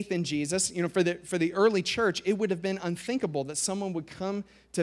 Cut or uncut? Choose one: uncut